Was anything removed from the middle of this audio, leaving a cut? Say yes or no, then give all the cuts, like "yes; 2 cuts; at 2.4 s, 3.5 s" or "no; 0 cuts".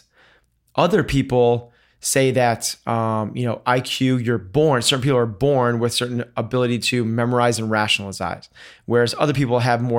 no; 0 cuts